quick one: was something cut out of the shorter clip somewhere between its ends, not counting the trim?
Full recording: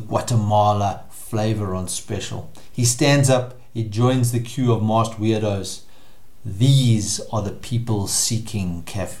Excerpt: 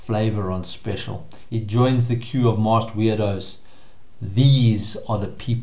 yes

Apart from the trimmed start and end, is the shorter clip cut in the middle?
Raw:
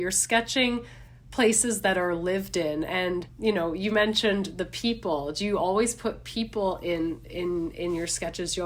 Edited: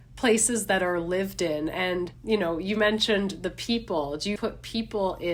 yes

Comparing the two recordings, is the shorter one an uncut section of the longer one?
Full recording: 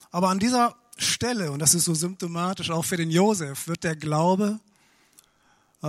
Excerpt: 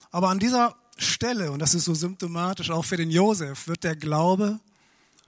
yes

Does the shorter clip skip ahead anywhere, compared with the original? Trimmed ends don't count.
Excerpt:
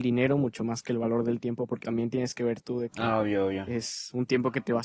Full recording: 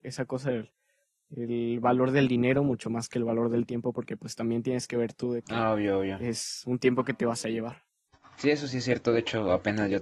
yes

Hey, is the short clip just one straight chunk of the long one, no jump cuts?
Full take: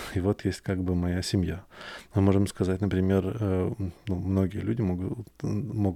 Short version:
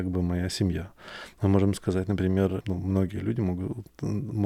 no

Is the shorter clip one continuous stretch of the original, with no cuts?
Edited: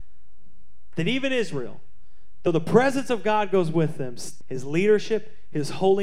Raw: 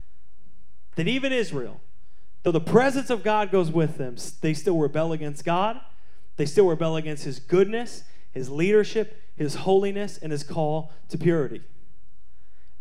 no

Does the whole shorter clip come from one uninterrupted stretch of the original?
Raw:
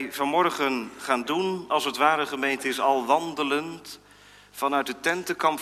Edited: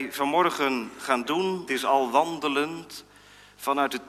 no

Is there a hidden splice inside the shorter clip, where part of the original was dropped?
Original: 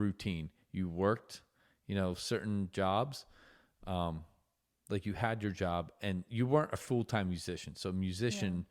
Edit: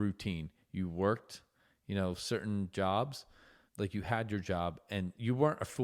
yes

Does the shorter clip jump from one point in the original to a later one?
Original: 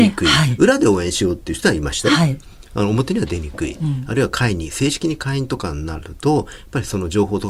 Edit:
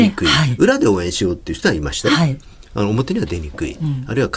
no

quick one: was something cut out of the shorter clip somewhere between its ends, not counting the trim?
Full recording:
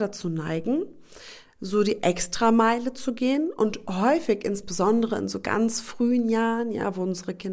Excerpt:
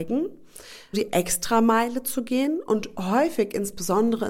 yes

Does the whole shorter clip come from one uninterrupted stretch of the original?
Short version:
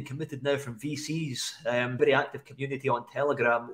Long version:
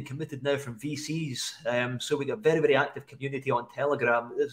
no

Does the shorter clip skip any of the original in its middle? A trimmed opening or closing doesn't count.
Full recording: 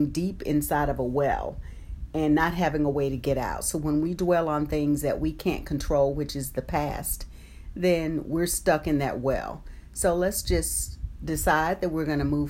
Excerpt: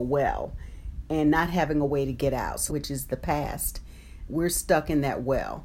yes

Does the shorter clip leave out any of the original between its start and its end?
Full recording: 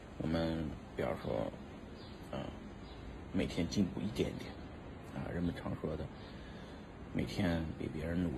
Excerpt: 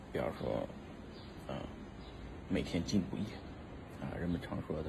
yes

